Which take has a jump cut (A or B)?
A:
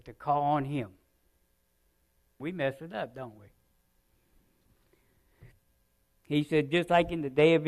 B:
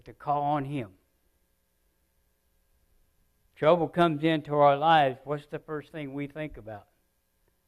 A